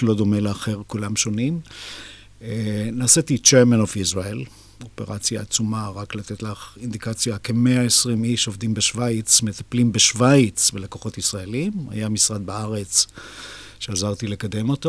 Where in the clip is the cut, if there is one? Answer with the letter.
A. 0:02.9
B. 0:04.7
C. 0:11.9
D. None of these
D